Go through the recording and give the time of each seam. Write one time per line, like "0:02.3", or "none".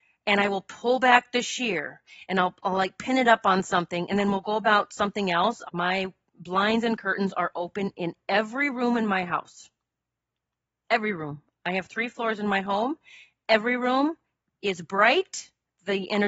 0:05.6

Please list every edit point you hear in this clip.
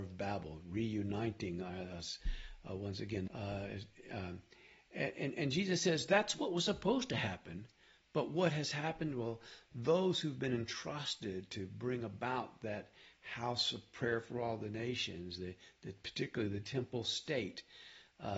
0:03.3

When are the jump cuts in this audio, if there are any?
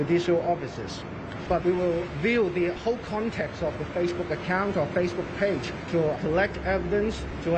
0:01.5

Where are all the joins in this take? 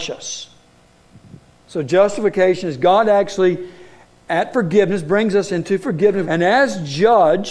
0:06.2

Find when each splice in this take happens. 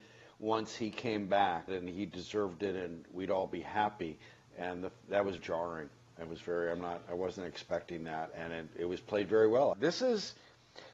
0:01.7
0:05.4
0:09.7

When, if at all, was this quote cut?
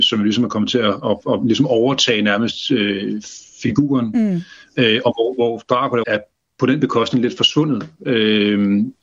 0:06.0

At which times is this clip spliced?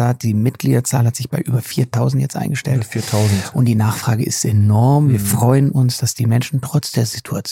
none

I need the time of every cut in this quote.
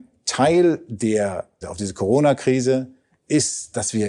0:01.6

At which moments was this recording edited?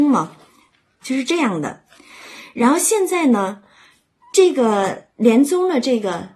0:01.0

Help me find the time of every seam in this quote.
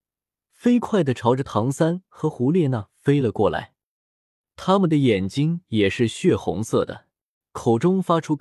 0:04.5
0:07.4

